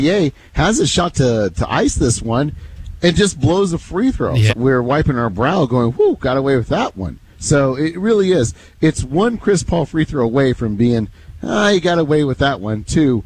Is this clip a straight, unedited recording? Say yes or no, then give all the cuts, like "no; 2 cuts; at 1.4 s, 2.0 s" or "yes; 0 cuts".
no; 1 cut; at 4.5 s